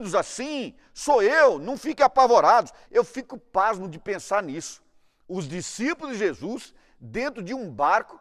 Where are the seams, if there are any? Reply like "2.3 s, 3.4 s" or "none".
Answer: 2.9 s